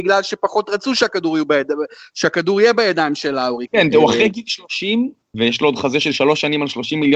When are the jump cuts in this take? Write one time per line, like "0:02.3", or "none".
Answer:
0:03.7
0:05.3